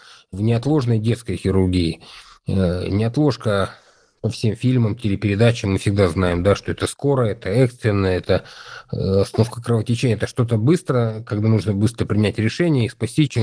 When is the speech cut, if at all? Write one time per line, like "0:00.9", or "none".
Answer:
none

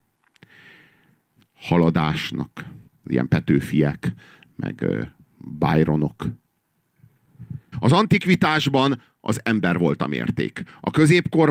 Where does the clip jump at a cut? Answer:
0:02.9
0:07.7

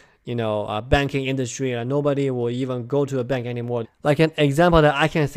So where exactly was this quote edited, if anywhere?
0:03.8

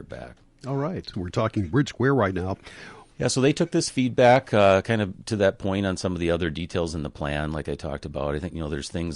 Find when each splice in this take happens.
0:01.1
0:03.1

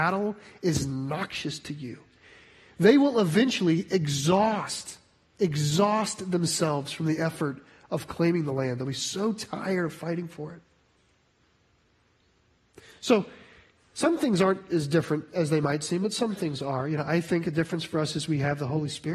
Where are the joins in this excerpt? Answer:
none

